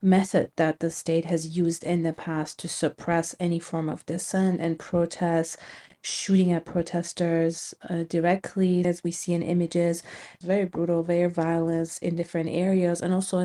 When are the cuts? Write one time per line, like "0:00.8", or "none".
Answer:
0:08.8
0:10.4